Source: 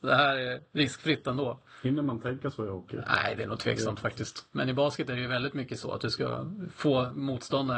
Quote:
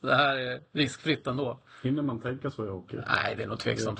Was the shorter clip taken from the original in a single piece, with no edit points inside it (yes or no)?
yes